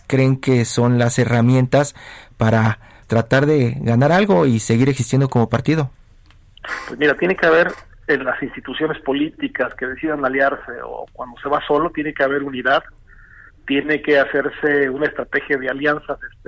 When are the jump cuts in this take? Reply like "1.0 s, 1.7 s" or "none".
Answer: 3.0 s